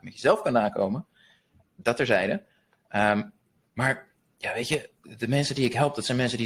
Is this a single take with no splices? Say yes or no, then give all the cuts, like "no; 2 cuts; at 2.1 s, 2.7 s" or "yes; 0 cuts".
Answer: yes; 0 cuts